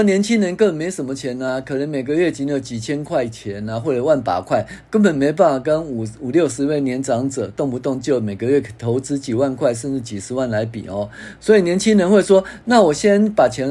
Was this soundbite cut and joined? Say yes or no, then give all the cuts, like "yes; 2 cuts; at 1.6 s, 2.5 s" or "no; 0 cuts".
no; 0 cuts